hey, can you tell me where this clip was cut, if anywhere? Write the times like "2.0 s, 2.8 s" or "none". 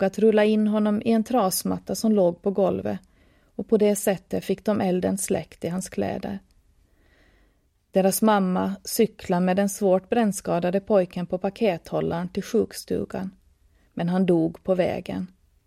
none